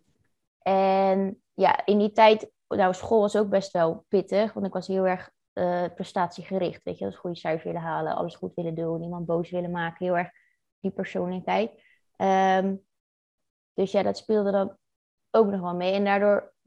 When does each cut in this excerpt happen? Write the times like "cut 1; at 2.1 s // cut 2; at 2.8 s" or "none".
none